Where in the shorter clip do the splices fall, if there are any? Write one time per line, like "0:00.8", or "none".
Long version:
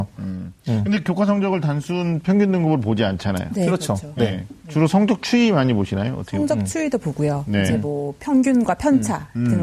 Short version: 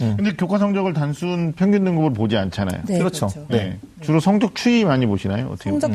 none